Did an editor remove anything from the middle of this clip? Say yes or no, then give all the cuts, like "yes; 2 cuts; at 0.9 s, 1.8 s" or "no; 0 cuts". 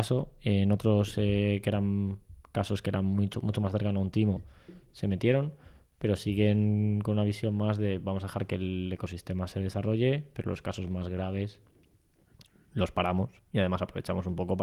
no; 0 cuts